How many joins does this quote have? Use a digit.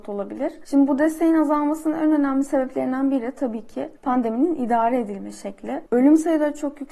0